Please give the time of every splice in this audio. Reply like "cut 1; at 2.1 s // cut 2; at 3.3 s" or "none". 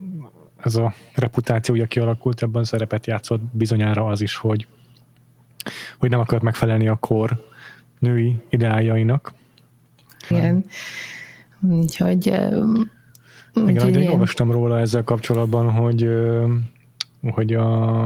cut 1; at 10.3 s

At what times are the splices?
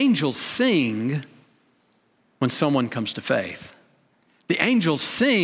none

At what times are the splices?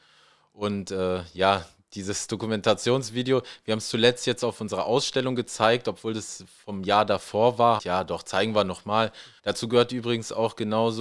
cut 1; at 7.8 s // cut 2; at 9.4 s

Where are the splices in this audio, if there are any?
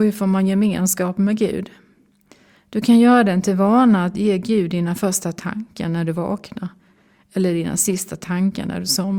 none

